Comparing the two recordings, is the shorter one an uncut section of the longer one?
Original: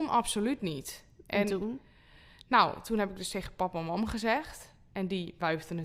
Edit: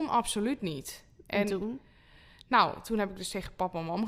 yes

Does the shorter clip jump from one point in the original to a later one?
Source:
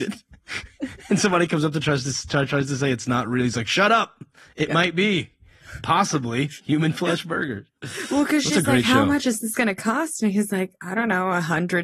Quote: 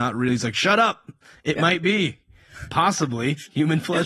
no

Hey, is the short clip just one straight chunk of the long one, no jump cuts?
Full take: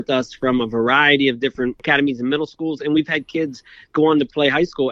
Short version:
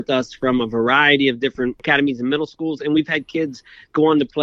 yes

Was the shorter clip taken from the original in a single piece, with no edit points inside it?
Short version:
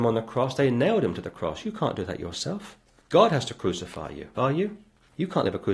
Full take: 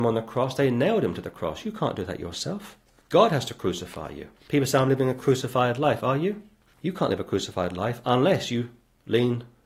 no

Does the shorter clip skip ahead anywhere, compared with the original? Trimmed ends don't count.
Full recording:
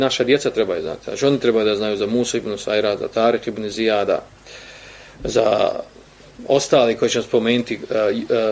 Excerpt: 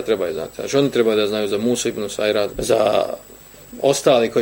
yes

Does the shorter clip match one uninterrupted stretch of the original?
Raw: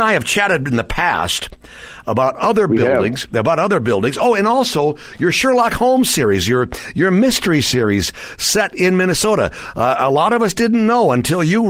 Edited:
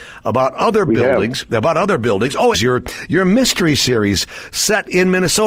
no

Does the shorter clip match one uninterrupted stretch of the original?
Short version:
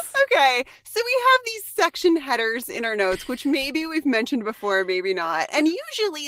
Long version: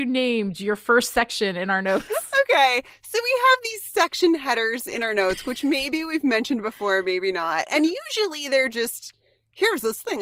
yes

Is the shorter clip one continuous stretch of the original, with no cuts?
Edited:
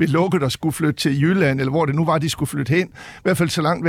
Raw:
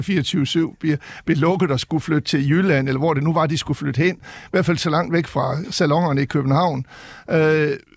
yes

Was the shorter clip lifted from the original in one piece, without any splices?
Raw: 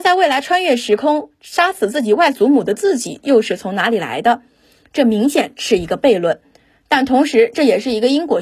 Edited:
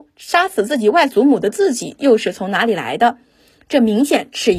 yes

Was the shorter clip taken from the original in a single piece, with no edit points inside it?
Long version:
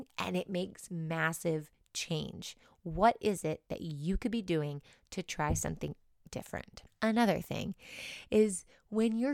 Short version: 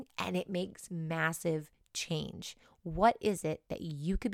yes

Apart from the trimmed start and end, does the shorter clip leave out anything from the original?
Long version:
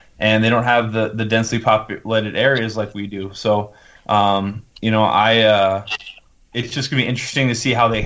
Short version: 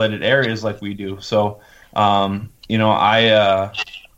no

